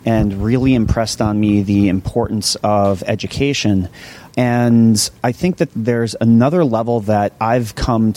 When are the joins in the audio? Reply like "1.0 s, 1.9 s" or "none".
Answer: 4.3 s, 5.7 s